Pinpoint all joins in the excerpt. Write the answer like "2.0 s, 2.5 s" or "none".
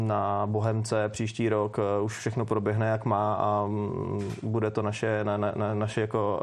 none